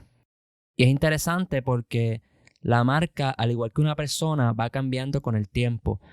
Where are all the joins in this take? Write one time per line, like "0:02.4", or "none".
none